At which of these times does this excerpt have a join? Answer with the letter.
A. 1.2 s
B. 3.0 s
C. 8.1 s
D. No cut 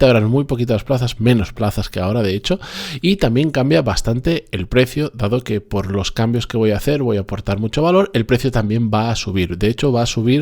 A